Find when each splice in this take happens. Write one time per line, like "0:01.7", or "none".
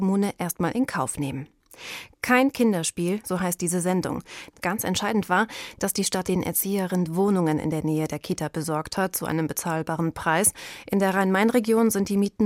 0:03.2
0:04.5